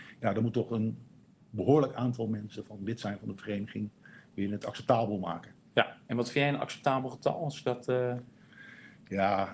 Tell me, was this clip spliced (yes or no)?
no